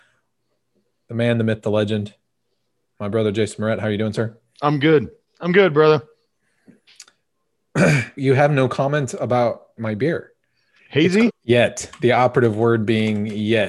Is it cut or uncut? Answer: cut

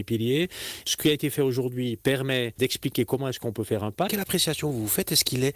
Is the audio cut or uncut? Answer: cut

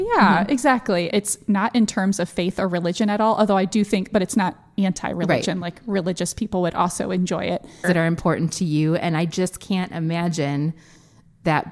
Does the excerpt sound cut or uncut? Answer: cut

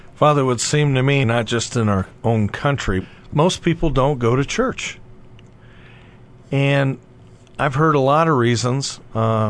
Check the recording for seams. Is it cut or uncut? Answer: cut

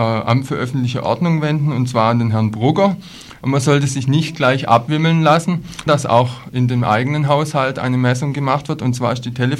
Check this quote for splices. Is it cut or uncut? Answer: cut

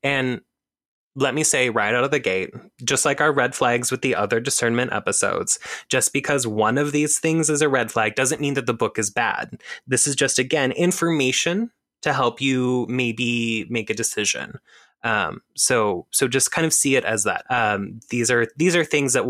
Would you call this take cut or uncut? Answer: cut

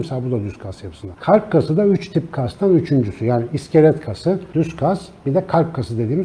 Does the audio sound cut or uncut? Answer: uncut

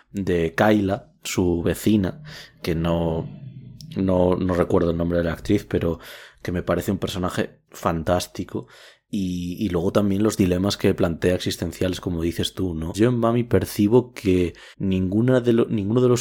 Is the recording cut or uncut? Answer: cut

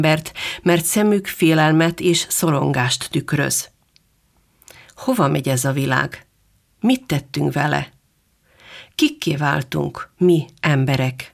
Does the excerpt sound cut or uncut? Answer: uncut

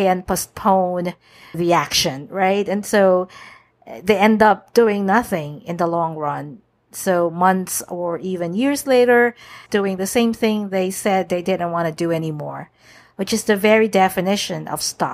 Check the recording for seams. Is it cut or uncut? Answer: cut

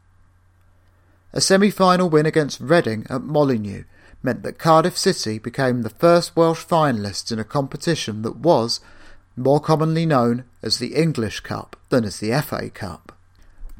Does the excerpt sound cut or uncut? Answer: cut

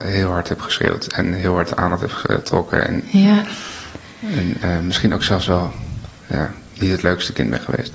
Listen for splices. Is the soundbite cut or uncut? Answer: uncut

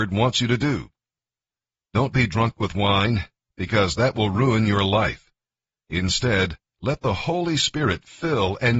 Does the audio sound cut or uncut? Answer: uncut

